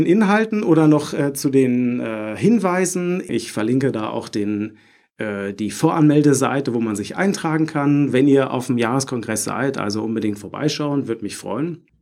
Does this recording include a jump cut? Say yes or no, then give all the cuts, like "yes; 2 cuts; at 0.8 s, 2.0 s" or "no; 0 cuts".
yes; 1 cut; at 3.3 s